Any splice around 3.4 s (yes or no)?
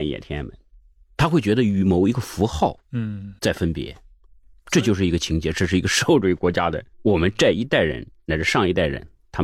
yes